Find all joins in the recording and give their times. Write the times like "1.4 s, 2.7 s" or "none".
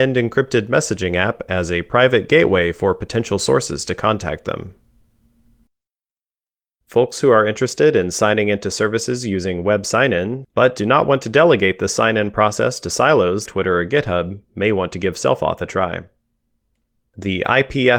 6.8 s, 10.4 s, 13.5 s

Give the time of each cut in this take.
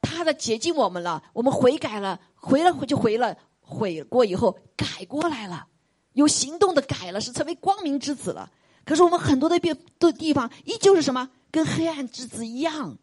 none

